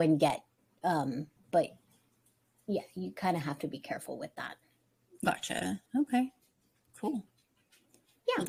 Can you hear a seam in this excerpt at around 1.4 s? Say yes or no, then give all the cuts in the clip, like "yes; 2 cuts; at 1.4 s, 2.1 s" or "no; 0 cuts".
yes; 2 cuts; at 1.4 s, 5.9 s